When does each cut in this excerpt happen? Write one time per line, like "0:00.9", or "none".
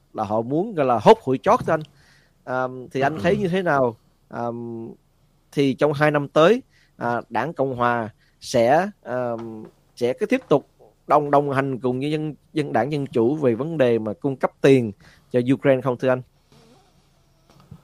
none